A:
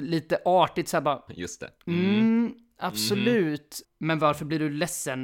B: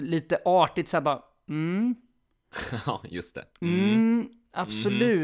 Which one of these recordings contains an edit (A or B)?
A